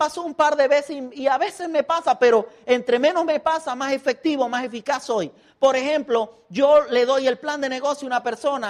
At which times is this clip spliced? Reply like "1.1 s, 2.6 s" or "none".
none